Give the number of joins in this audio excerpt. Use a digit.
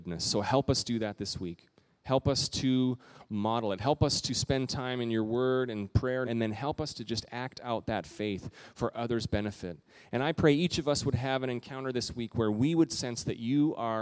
1